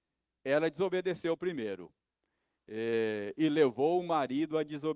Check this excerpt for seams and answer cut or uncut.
uncut